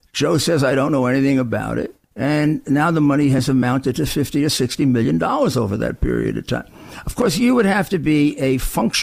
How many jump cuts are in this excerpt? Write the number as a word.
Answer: one